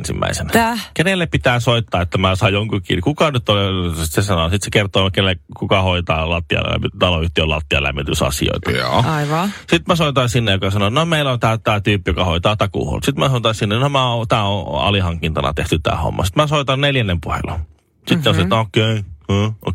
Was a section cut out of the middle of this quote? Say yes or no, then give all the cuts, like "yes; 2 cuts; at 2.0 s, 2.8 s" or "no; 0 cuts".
no; 0 cuts